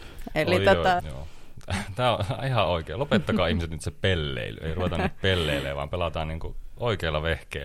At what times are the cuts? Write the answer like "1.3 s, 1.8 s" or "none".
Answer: 1.0 s